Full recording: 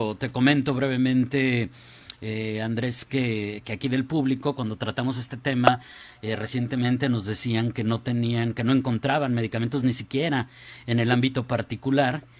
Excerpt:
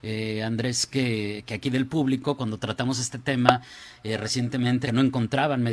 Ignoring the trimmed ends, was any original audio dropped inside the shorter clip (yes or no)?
yes